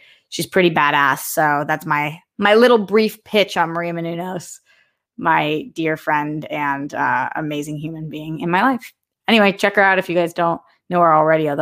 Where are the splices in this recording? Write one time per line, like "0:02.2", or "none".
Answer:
none